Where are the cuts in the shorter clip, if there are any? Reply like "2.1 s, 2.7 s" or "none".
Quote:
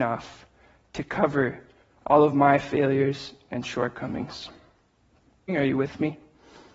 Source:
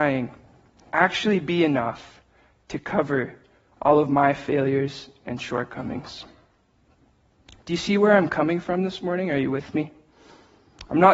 5.5 s